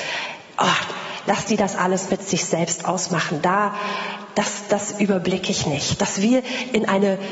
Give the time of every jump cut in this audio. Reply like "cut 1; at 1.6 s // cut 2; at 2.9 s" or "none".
none